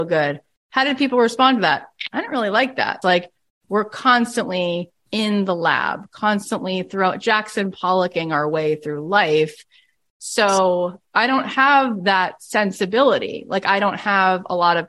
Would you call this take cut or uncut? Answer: cut